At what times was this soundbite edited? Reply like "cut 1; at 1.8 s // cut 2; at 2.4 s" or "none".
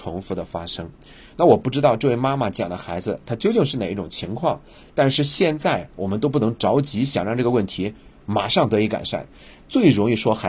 none

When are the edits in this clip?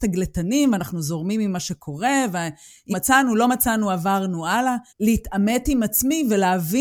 cut 1; at 2.9 s // cut 2; at 4.9 s

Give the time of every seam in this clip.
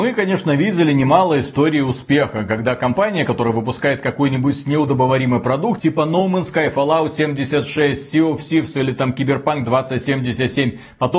none

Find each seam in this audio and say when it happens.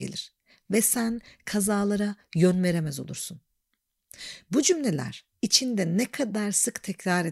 none

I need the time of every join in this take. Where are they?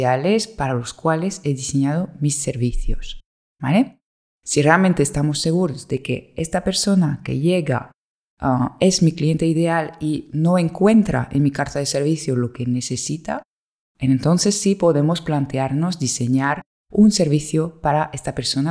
none

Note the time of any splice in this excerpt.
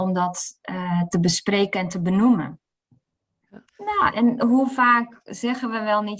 cut 1; at 3.7 s

